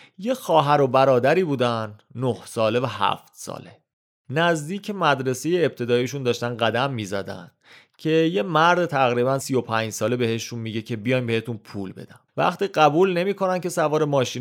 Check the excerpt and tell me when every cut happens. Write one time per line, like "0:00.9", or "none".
0:09.4
0:12.3